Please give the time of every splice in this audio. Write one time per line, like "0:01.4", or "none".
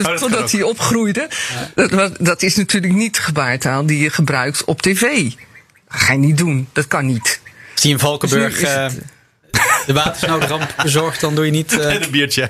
none